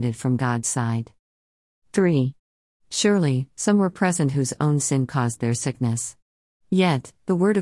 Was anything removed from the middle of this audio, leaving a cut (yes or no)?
yes